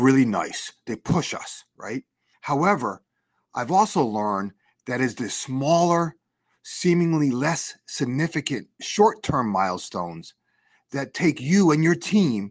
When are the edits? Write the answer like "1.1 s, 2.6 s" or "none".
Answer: 2.3 s